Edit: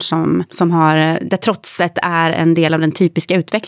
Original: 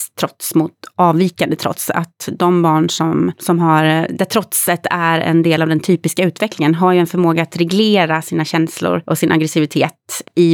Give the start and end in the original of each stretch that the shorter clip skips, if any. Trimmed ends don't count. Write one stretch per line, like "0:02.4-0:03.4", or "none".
none